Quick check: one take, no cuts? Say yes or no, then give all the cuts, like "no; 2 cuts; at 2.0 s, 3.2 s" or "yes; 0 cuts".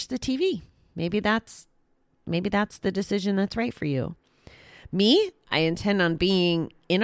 yes; 0 cuts